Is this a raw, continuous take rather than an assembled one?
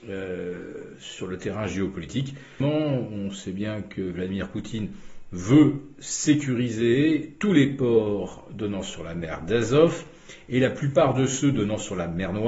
no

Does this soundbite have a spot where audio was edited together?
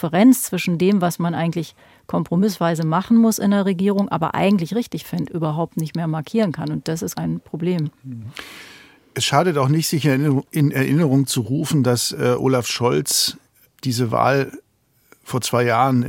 yes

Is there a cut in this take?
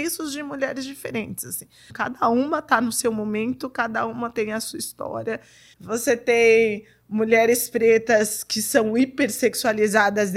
yes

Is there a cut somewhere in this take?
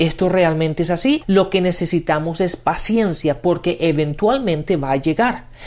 yes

